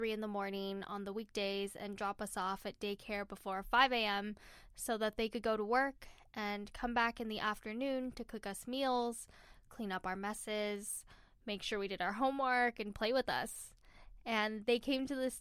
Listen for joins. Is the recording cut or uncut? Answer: uncut